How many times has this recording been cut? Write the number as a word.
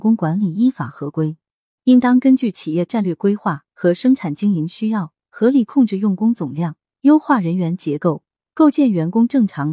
one